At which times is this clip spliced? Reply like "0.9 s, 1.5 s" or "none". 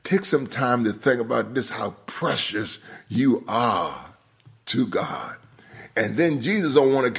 none